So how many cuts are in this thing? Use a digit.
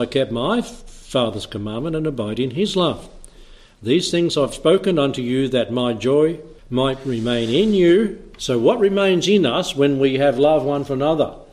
1